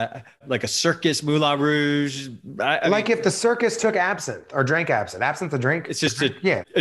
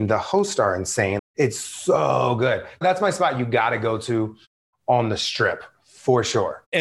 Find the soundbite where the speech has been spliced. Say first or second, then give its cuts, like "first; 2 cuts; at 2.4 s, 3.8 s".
second; 1 cut; at 1.2 s